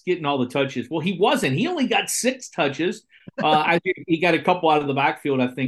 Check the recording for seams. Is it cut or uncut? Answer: uncut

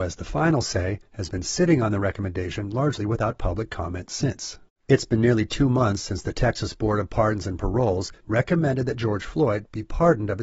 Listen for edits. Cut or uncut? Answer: cut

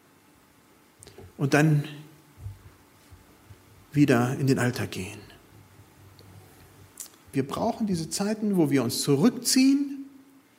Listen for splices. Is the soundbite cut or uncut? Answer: cut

